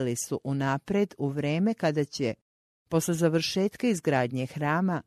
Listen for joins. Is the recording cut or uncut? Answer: uncut